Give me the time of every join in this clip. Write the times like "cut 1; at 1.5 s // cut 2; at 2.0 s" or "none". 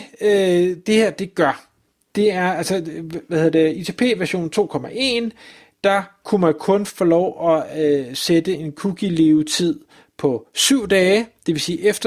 none